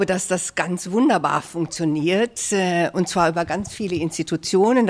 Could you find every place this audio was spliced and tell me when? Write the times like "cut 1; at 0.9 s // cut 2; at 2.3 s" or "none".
none

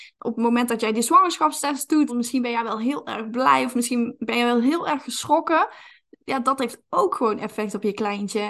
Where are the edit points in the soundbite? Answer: cut 1; at 2.1 s

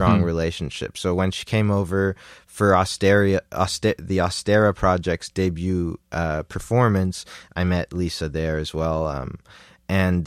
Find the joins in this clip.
none

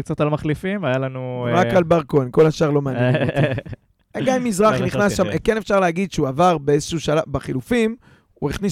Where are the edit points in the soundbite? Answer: none

